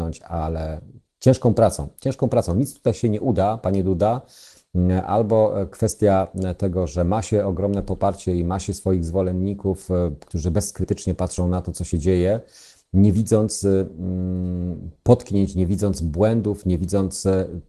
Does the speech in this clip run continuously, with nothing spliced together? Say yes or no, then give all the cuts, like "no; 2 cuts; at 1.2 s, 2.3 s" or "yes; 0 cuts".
yes; 0 cuts